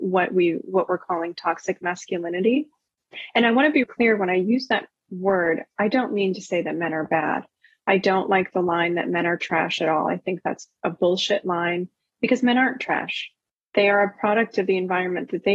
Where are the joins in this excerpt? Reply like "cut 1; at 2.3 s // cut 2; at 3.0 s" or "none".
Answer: cut 1; at 3.8 s